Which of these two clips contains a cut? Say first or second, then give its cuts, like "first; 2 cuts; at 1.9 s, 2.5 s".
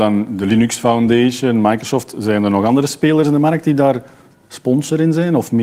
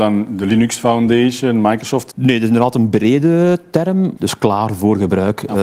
second; 2 cuts; at 2.1 s, 4.2 s